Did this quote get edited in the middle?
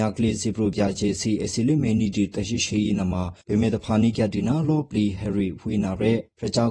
yes; 1 cut; at 3.4 s

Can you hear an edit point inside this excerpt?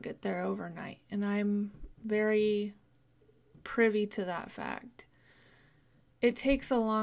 no; 0 cuts

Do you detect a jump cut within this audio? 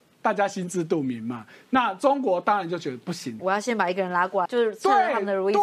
yes; 2 cuts; at 3.4 s, 4.5 s

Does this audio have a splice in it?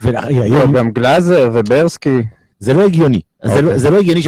yes; 1 cut; at 2.5 s

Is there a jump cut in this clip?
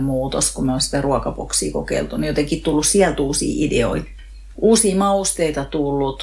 no; 0 cuts

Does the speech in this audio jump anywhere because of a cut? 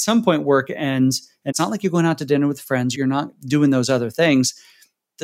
yes; 2 cuts; at 1.5 s, 2.9 s

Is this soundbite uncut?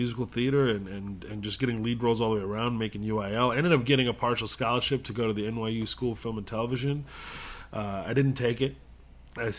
yes; 0 cuts

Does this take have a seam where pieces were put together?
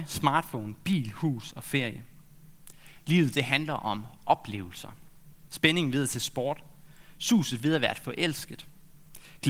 yes; 1 cut; at 5.5 s

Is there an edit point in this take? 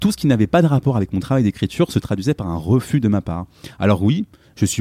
no; 0 cuts

